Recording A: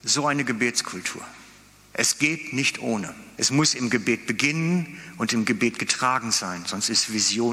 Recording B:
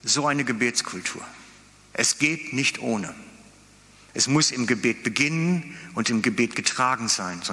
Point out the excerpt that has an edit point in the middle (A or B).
A